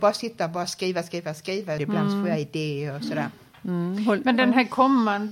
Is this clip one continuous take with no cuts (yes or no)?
no